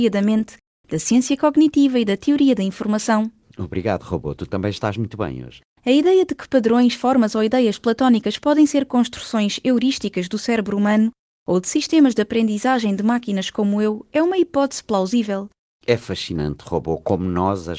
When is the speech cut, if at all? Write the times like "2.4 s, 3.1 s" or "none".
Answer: 5.8 s, 15.7 s